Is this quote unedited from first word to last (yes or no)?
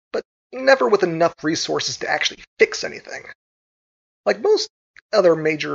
yes